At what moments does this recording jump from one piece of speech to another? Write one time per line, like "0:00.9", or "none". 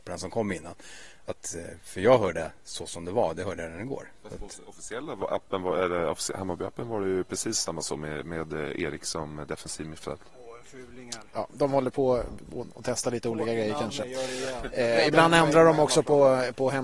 none